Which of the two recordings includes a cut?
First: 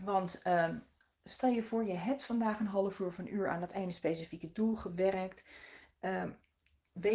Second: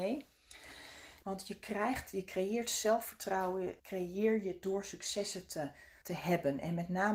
second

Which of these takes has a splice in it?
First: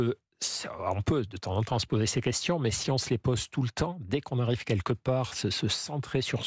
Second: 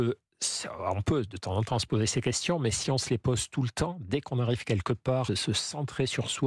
second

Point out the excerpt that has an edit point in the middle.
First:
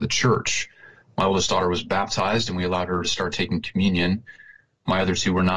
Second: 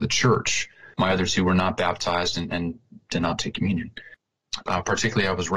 second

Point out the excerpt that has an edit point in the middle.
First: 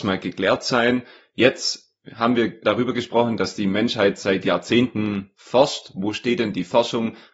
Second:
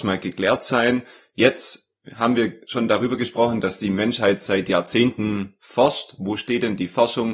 first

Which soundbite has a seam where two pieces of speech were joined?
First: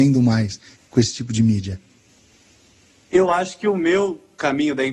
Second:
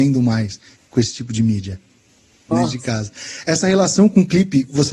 second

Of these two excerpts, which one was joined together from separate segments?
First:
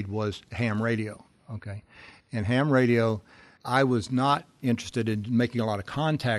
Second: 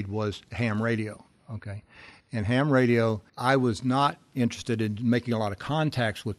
second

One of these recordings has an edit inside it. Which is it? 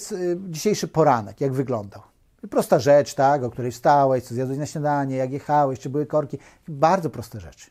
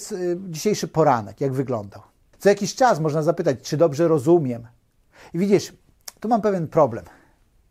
second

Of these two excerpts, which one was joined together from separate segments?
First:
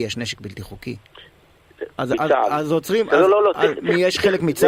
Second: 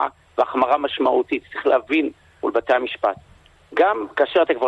first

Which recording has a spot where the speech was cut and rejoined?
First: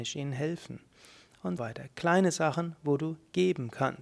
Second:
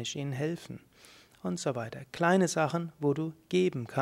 first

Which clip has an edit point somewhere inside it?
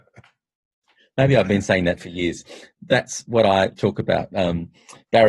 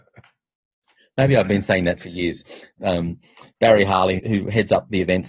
second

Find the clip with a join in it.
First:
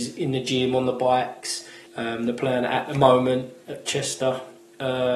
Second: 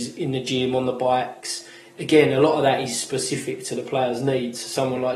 first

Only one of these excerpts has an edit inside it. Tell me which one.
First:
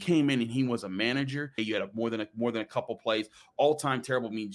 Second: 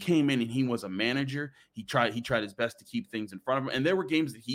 first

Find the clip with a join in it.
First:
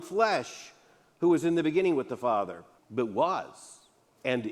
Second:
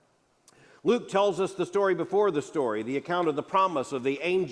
first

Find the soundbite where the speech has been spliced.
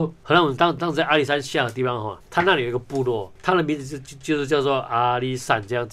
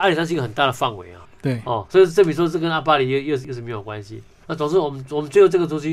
second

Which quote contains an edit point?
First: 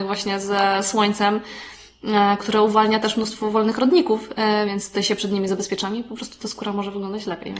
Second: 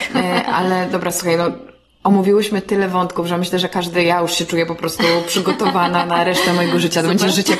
first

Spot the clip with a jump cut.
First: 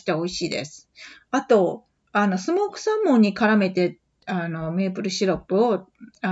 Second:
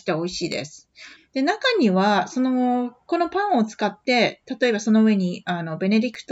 second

